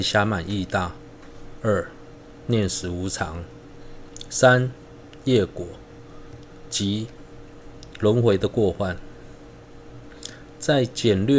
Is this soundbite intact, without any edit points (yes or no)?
yes